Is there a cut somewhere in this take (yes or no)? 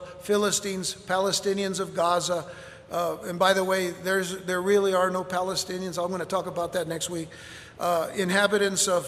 no